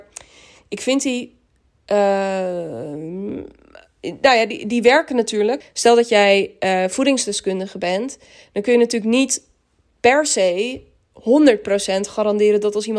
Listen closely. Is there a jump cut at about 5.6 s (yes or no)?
yes